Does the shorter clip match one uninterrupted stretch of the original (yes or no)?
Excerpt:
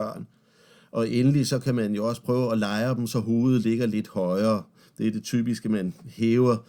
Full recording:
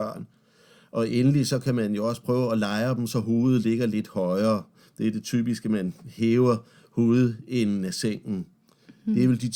yes